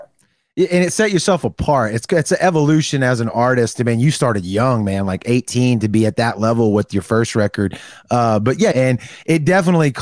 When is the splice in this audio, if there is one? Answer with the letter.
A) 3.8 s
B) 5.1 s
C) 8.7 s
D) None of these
C